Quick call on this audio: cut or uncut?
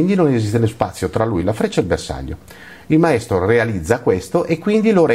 uncut